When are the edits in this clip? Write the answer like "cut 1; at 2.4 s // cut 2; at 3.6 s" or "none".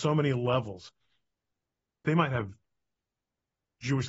cut 1; at 2.0 s